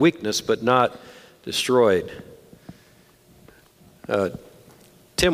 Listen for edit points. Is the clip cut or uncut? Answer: uncut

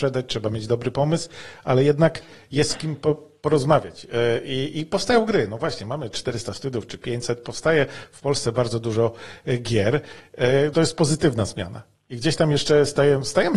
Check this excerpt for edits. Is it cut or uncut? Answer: cut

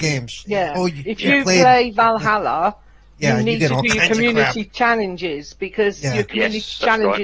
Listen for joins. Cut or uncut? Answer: uncut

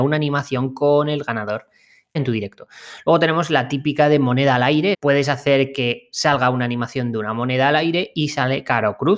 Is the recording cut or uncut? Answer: cut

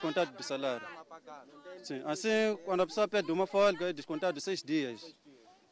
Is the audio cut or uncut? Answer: uncut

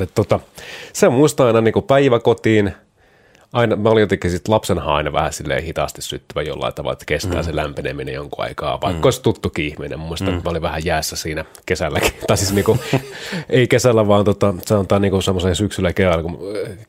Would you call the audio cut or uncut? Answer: uncut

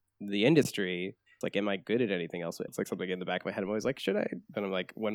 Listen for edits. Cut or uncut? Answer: cut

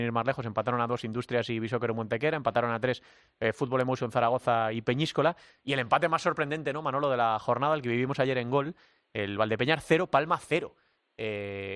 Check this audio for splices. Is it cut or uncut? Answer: uncut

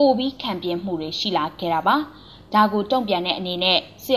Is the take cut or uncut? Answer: uncut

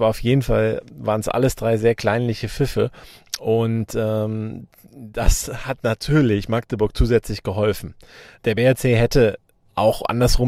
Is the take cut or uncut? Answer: uncut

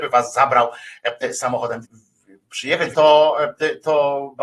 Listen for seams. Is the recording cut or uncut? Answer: cut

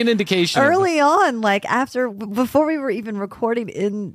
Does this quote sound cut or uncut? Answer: uncut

